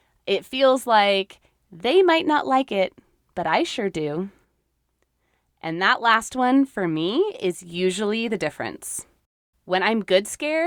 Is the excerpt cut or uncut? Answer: uncut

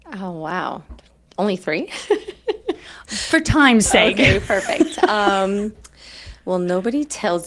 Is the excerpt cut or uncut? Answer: uncut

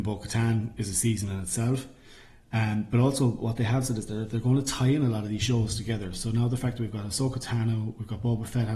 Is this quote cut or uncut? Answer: uncut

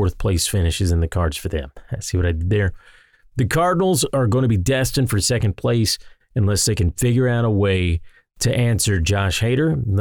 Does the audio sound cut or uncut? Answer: uncut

